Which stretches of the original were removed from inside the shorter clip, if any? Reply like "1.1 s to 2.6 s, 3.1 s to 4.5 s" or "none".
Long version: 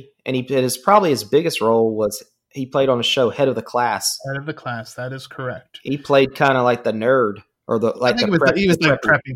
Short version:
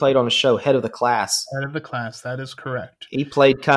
none